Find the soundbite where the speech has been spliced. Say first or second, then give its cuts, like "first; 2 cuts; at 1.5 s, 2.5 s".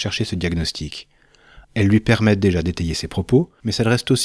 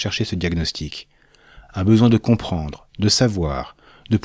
first; 1 cut; at 1.6 s